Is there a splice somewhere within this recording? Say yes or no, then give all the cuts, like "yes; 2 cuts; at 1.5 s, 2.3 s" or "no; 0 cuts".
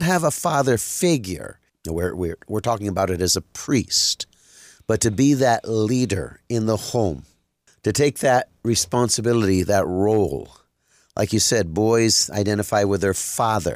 yes; 1 cut; at 1.7 s